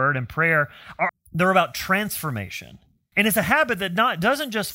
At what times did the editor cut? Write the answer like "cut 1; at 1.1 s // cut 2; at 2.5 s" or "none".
cut 1; at 1.1 s // cut 2; at 3.1 s